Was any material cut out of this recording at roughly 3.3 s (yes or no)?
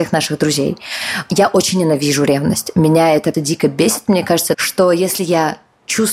yes